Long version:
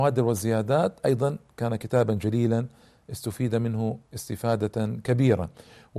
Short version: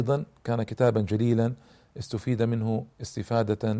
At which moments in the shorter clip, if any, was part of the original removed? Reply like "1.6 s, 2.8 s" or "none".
none